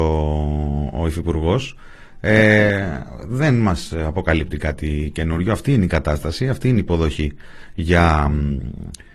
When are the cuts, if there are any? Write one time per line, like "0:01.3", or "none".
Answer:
none